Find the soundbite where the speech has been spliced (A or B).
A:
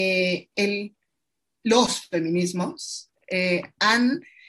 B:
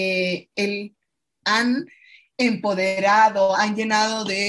B